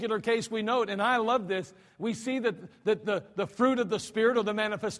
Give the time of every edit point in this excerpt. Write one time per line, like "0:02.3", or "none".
none